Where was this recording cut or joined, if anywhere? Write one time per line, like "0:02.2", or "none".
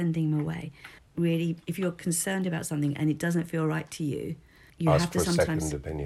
0:01.0
0:04.7